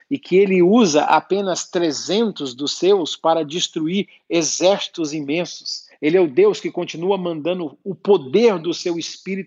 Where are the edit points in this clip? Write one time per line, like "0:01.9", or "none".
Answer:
0:05.9